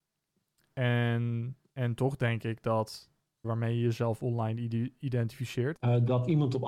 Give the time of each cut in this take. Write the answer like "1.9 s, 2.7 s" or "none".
3.4 s, 5.8 s